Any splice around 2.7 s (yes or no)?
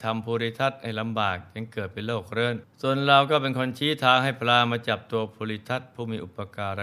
yes